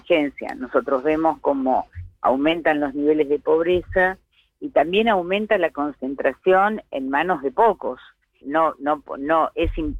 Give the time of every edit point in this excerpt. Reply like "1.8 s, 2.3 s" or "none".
8.4 s